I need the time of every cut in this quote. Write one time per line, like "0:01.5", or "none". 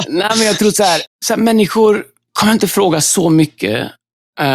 0:01.1